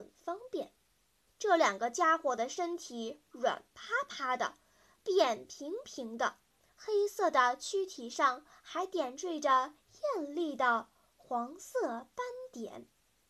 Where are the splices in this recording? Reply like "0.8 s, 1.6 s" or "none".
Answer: 1.3 s, 6.7 s